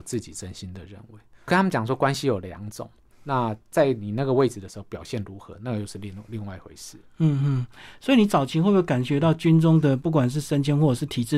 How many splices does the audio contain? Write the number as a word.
one